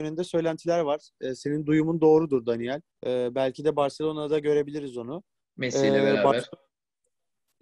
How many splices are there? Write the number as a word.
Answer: one